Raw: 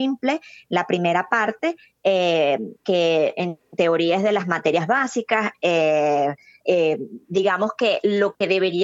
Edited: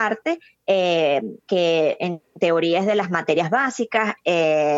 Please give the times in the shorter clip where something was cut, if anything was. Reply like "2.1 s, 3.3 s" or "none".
none

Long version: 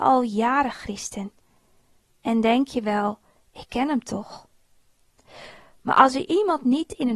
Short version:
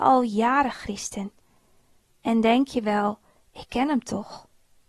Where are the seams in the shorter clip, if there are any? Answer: none

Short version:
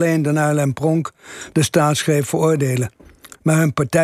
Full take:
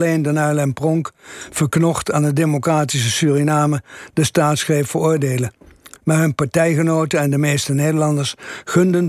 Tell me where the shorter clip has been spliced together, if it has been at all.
1.5 s

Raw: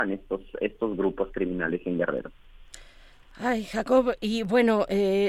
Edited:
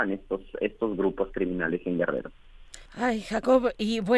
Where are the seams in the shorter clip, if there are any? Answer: 2.9 s

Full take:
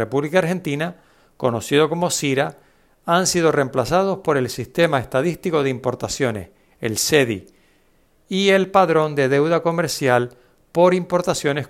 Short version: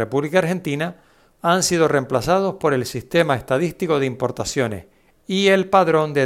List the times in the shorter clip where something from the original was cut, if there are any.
1.3 s, 5.1 s

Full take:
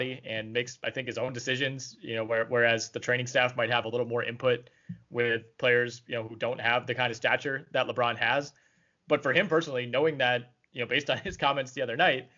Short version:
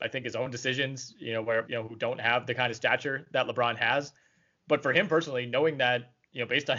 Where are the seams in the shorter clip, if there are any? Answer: 1.6 s

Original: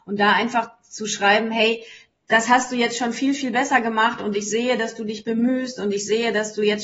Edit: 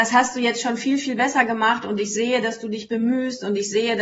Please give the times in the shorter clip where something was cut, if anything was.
none

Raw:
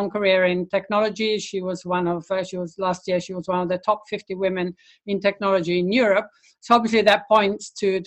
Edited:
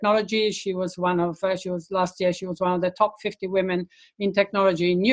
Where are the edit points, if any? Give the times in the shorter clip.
none

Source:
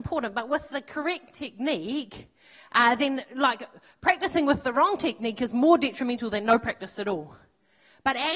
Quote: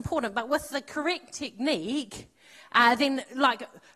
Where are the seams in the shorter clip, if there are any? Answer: none

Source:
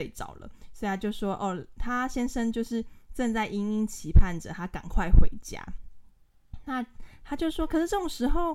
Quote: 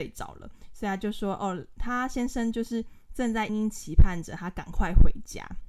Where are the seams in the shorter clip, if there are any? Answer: 3.5 s

